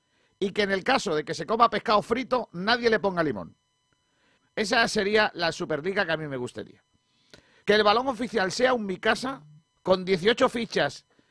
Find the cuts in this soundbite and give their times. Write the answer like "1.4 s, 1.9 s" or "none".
4.4 s, 7.6 s, 9.8 s